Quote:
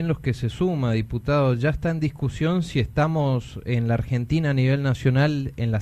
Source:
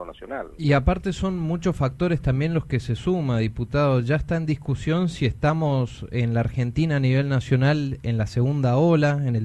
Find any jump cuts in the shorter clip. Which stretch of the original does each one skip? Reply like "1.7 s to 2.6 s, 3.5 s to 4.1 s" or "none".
none